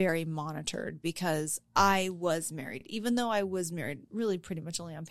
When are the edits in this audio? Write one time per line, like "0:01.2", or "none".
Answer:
none